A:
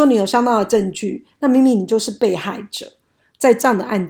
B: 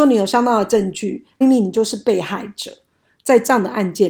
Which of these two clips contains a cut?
B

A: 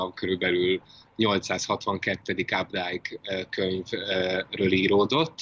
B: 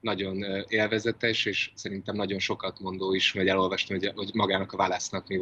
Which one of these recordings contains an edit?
B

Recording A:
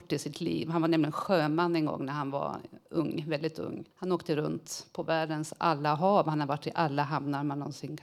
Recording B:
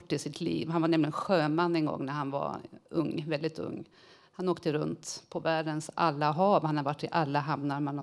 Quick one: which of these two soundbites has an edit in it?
A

